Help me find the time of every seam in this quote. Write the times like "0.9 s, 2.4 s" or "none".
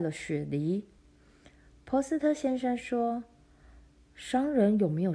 1.0 s